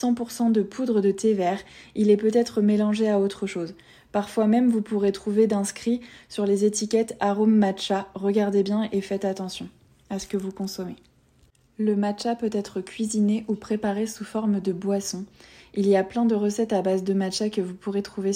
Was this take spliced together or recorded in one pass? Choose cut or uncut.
uncut